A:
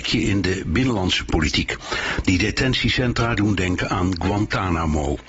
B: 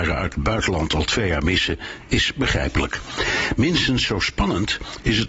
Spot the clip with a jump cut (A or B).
A